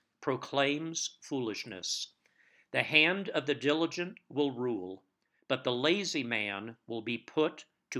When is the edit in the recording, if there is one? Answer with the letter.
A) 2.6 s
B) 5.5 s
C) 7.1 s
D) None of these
D